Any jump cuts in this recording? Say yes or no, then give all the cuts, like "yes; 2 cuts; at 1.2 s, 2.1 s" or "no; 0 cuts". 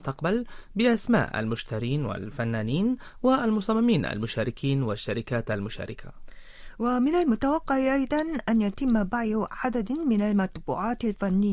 no; 0 cuts